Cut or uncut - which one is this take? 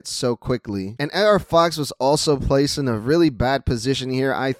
cut